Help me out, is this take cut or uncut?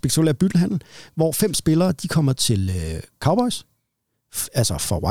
uncut